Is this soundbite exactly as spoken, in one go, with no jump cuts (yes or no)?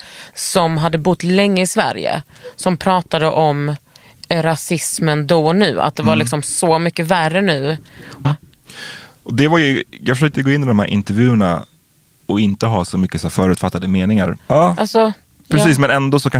no